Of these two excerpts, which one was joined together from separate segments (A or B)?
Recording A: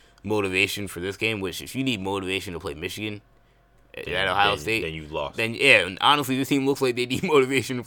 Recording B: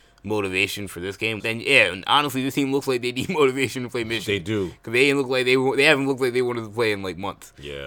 B